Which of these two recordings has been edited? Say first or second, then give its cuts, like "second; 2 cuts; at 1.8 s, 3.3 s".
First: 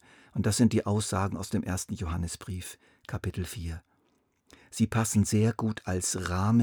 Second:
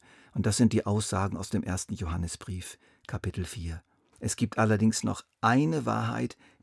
second; 1 cut; at 4.1 s